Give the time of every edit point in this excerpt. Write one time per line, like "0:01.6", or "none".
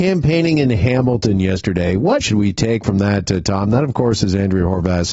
0:02.2

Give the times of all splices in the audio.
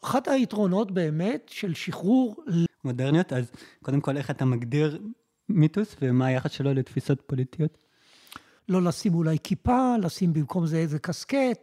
0:02.7
0:08.6

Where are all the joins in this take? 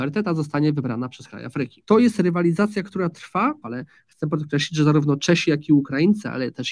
0:01.8
0:03.6

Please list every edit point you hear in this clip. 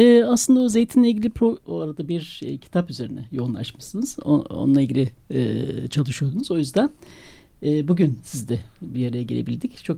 0:01.6

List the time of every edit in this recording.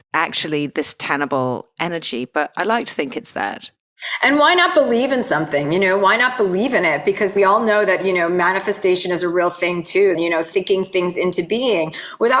0:10.1

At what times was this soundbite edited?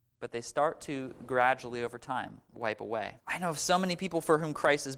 0:03.2

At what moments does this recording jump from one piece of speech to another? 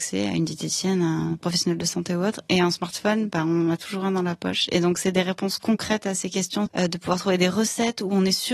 0:06.7

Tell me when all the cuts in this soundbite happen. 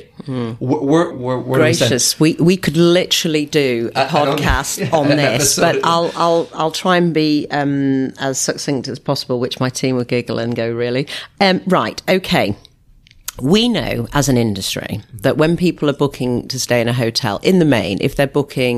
0:01.1

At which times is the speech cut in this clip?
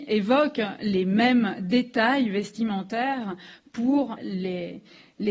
0:04.2

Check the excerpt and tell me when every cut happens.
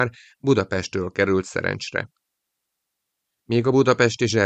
none

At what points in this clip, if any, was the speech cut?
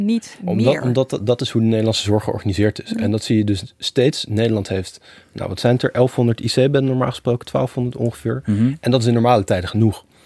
none

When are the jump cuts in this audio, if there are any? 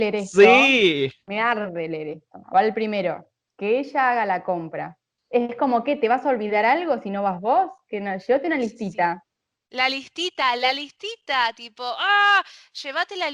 none

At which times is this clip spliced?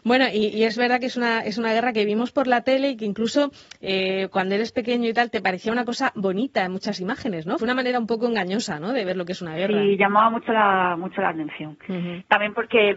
0:07.6

